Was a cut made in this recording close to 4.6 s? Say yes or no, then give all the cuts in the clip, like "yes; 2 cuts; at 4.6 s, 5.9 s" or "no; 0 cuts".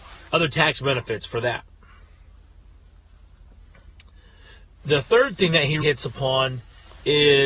no; 1 cut; at 5.8 s